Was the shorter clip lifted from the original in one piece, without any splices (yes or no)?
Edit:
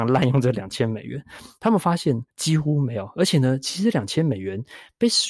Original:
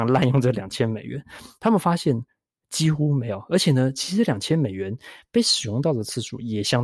no